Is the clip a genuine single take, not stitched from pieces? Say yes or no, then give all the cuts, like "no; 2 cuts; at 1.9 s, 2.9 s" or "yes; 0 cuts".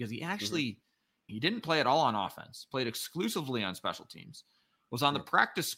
no; 1 cut; at 1.3 s